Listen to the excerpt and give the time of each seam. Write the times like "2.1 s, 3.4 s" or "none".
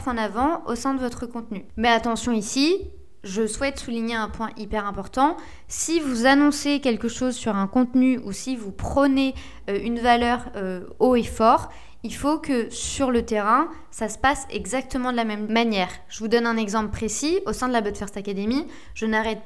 none